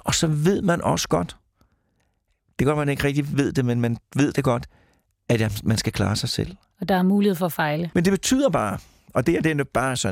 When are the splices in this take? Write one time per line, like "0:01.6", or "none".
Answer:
0:07.9